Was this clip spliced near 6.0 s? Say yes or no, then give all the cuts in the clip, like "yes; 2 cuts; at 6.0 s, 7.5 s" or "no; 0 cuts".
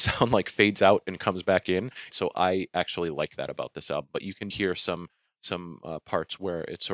no; 2 cuts; at 2.1 s, 4.5 s